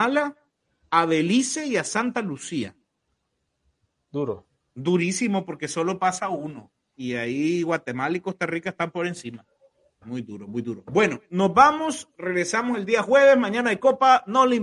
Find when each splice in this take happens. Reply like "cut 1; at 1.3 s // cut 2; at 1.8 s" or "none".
cut 1; at 10.0 s